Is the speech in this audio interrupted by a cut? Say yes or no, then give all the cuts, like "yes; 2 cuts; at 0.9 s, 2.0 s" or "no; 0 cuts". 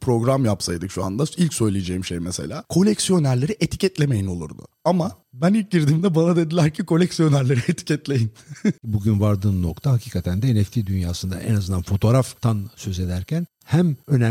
yes; 1 cut; at 8.8 s